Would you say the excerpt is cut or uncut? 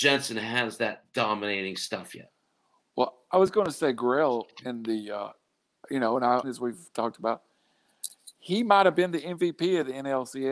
cut